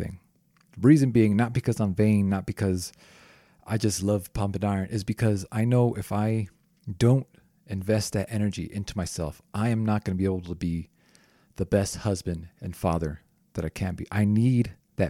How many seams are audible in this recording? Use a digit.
0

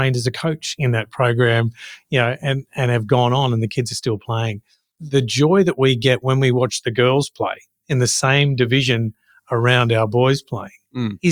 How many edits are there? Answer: 0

